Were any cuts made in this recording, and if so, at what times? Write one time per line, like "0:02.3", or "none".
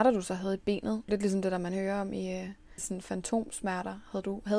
0:01.1
0:02.8